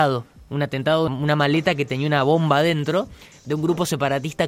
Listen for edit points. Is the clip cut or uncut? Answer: cut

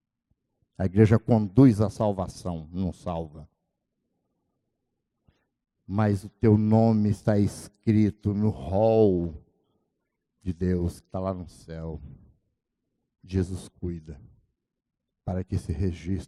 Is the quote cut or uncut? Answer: uncut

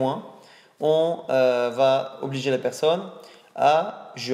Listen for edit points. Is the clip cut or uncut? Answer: uncut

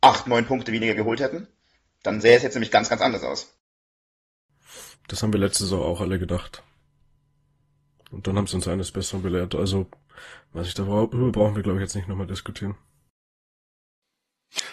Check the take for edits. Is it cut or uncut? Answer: cut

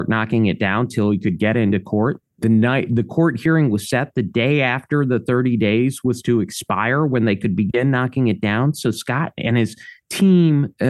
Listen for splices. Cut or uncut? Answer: cut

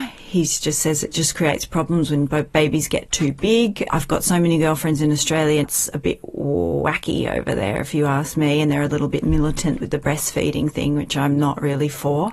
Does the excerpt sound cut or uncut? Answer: cut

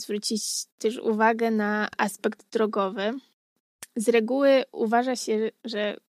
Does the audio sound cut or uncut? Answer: uncut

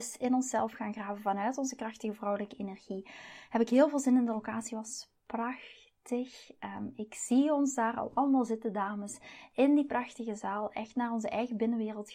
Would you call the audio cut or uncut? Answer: uncut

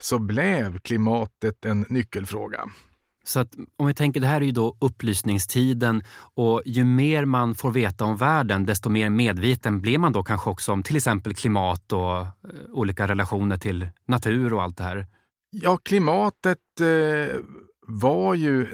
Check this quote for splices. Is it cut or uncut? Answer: uncut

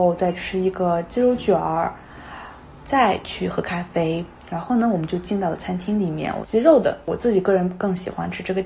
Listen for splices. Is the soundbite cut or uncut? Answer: cut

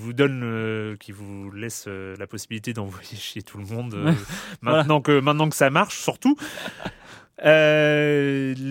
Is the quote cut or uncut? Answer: uncut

